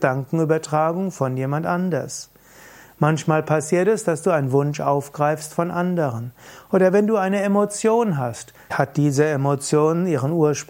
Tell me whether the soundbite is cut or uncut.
cut